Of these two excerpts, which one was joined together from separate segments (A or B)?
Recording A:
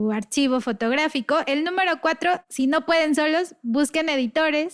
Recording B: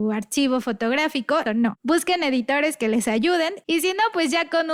B